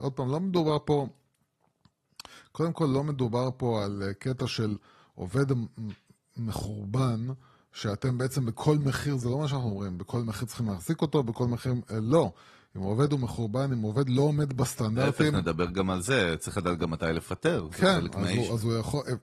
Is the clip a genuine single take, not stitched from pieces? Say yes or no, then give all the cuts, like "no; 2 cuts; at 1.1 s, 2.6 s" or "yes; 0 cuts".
yes; 0 cuts